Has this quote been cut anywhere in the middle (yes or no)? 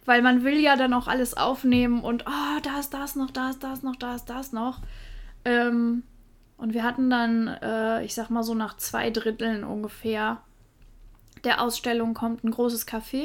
no